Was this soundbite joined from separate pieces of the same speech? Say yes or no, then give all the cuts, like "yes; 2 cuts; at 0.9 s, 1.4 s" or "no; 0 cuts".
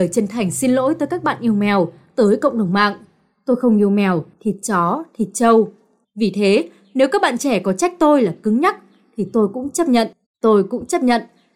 yes; 3 cuts; at 4.3 s, 6.0 s, 10.2 s